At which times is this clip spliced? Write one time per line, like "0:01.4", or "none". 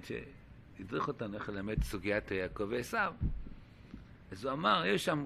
none